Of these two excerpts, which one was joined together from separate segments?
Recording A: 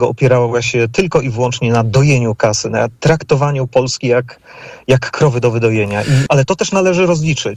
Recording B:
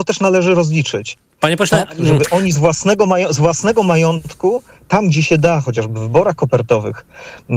A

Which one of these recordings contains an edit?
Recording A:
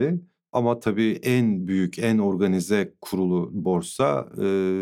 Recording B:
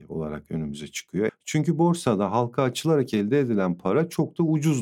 B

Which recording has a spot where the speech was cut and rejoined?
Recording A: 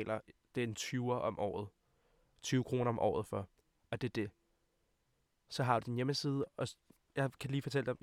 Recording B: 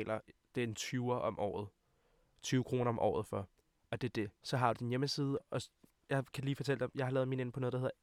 B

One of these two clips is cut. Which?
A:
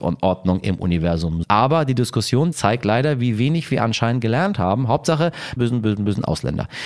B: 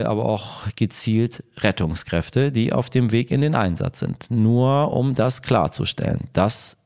A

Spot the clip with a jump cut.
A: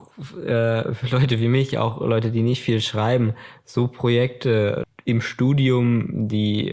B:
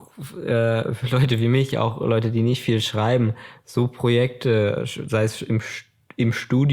A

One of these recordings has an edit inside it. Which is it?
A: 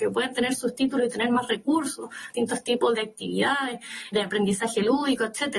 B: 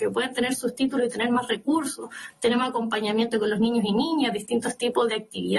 A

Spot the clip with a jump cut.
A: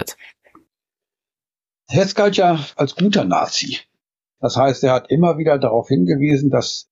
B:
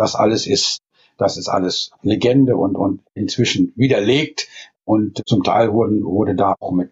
A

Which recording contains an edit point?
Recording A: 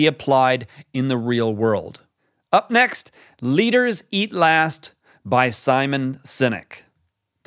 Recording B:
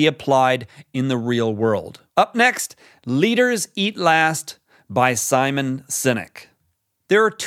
B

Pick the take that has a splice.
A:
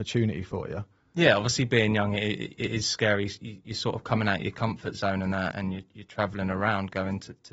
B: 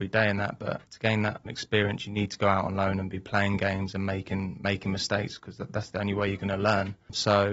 A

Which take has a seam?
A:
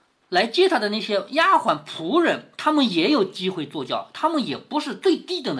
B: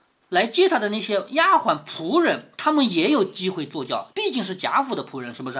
B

